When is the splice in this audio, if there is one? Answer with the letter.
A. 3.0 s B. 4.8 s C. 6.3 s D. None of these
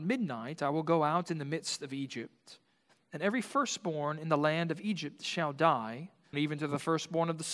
C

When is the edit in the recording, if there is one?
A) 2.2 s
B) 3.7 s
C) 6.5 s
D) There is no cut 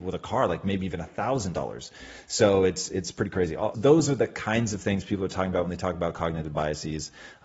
B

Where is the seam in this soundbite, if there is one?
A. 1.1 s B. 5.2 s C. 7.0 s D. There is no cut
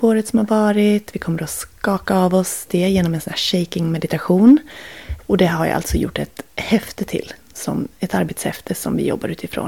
B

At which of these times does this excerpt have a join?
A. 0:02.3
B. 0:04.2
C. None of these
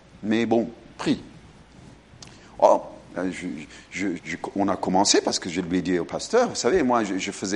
B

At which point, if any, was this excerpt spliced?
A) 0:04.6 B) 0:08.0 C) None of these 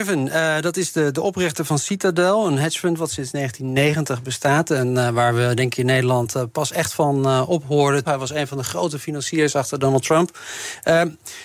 B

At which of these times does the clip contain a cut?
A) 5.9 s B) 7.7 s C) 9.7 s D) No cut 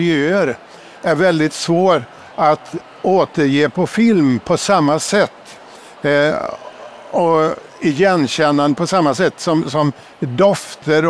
D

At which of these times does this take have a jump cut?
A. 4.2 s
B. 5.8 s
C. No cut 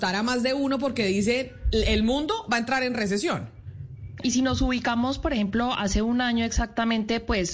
A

